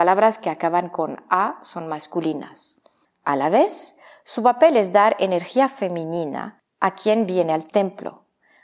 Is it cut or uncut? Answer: cut